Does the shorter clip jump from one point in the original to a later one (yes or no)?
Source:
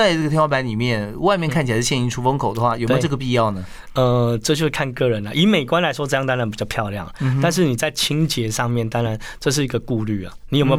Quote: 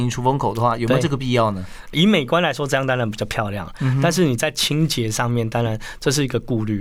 yes